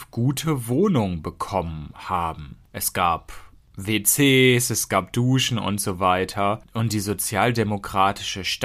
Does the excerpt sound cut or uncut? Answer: uncut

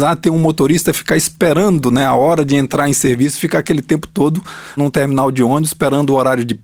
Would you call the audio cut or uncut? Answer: cut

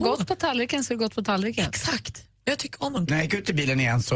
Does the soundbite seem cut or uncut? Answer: cut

